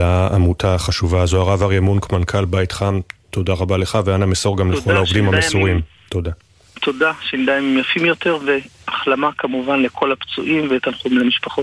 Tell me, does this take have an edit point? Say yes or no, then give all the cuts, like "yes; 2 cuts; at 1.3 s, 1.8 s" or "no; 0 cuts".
no; 0 cuts